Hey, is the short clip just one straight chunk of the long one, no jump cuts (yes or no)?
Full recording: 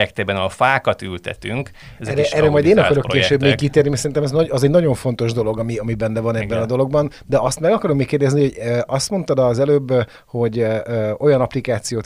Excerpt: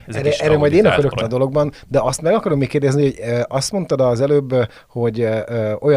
no